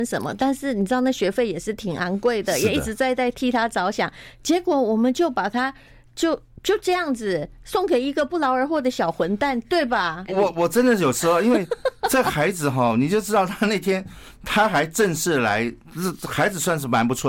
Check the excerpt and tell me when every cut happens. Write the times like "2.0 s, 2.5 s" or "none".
10.3 s

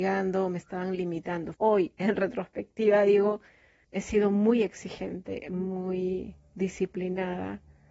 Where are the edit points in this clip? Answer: 1.5 s, 3.8 s

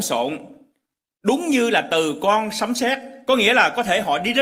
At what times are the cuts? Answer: none

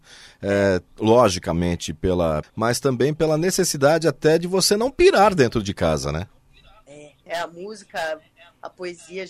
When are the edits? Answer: 2.4 s, 7.3 s

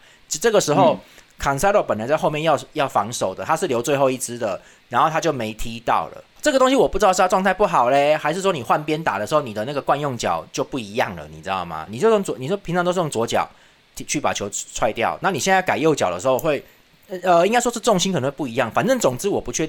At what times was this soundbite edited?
11.9 s

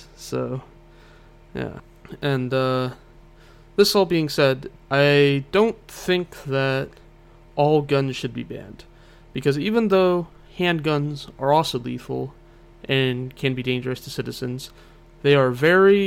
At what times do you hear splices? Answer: none

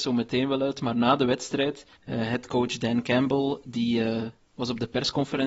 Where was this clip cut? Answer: 2.0 s

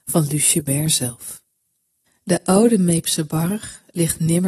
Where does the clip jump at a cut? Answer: 2.1 s

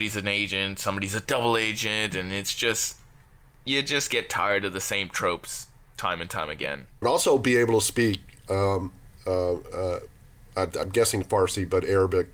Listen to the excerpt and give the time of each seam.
7.0 s

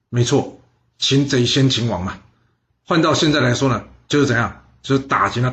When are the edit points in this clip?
none

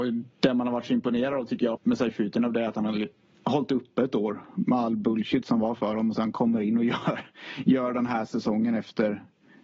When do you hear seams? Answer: 1.7 s

